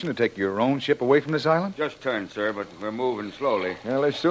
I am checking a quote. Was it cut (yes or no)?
yes